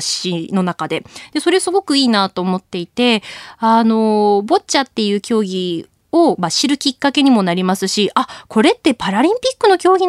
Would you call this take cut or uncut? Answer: uncut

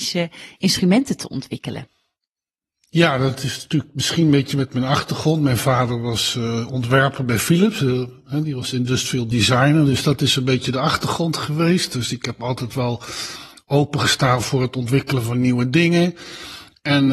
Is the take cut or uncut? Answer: uncut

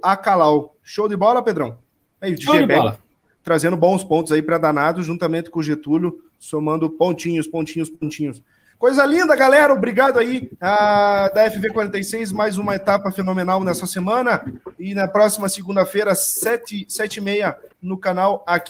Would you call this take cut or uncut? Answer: cut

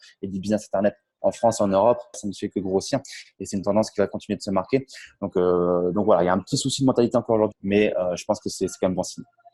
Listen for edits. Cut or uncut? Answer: cut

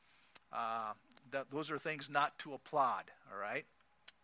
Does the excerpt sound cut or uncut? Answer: uncut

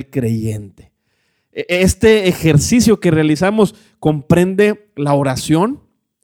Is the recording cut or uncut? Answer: uncut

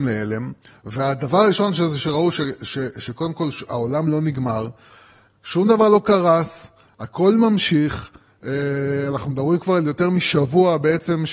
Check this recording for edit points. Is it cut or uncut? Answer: uncut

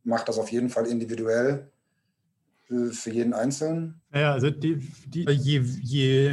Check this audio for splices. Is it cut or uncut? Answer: cut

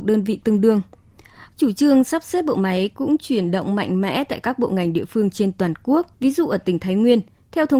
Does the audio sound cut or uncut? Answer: cut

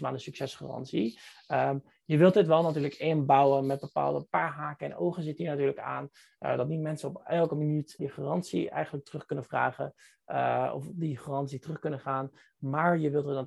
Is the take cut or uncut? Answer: cut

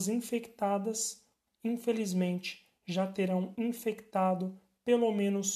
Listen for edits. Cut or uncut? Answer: cut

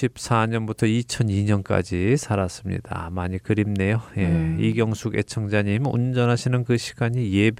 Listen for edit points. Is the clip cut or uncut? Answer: uncut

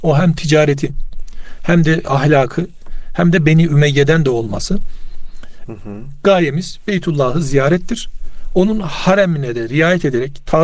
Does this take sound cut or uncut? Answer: cut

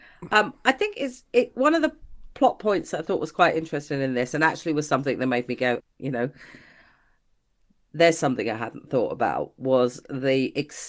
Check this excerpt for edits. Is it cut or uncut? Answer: cut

